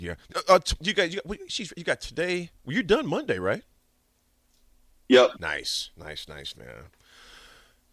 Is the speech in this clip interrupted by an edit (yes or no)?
yes